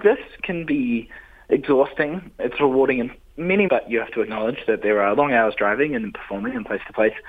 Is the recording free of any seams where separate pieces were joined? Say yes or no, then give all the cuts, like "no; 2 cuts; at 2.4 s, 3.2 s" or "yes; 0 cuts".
no; 2 cuts; at 2.4 s, 3.7 s